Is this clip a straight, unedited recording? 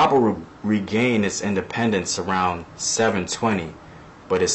yes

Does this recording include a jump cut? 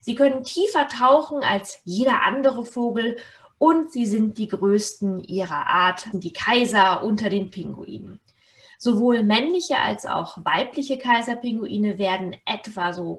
yes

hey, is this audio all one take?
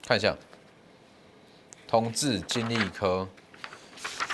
yes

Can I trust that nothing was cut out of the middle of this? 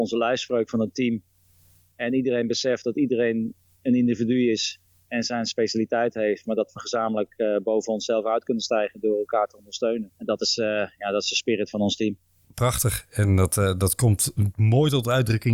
no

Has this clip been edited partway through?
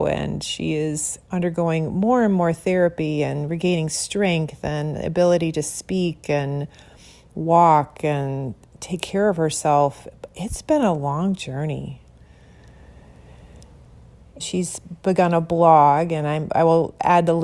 yes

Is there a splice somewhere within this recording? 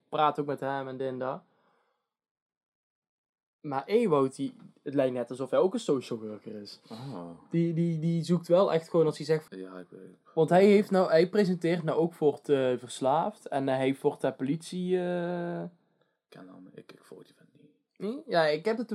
yes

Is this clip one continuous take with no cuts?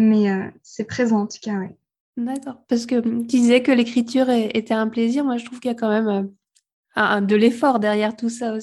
yes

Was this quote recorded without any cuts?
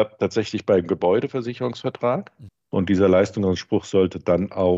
no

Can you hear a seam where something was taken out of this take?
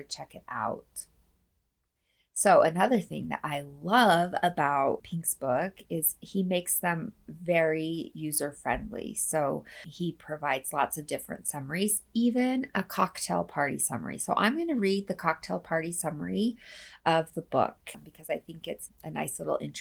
no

